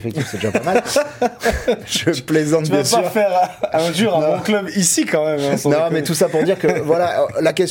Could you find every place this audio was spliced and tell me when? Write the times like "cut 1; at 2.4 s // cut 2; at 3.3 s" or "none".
none